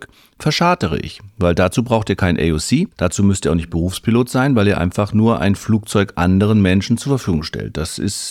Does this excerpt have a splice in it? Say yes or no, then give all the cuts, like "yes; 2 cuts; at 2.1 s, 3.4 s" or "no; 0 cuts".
yes; 1 cut; at 2.9 s